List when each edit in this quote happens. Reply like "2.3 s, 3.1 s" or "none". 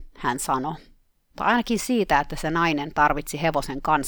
1.2 s